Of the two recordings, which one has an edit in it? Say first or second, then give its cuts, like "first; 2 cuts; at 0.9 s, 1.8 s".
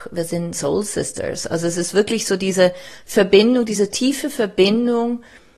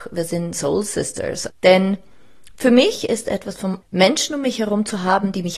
second; 2 cuts; at 1.5 s, 3.8 s